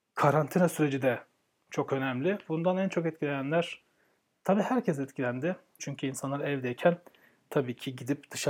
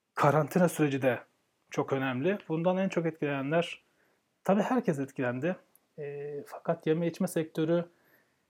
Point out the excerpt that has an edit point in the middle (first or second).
first